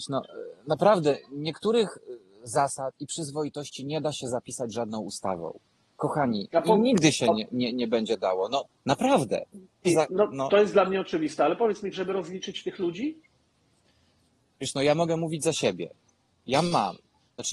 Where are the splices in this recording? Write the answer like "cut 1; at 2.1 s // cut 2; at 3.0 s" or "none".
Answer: cut 1; at 9.8 s // cut 2; at 11.9 s